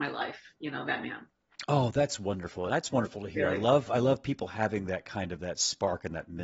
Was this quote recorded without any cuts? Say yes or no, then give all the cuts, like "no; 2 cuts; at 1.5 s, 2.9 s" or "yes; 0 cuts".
yes; 0 cuts